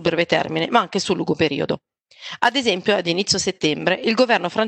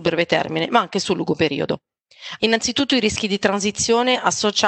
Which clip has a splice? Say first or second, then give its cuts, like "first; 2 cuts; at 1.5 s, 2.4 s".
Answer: second; 1 cut; at 2.4 s